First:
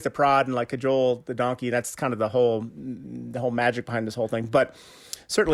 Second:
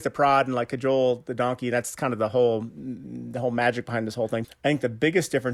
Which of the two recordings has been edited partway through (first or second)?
second